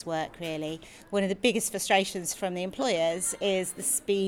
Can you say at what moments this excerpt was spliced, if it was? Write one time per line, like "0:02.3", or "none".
none